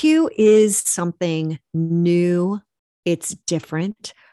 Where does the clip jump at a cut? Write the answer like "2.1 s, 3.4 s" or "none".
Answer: none